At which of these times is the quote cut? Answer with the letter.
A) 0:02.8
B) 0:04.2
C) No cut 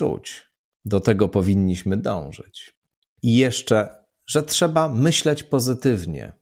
C